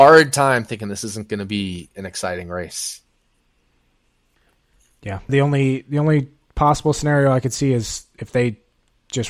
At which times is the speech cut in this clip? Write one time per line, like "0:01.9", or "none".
0:05.3